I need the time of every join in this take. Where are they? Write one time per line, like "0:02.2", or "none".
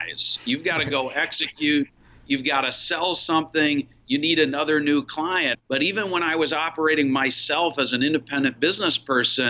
0:05.5